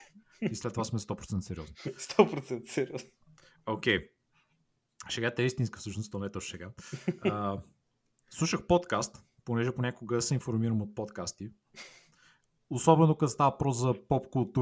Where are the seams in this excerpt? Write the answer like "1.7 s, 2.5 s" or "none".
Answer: none